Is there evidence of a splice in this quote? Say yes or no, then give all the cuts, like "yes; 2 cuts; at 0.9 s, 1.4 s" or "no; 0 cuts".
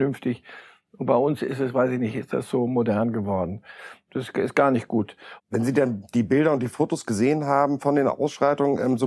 yes; 2 cuts; at 4.1 s, 5.4 s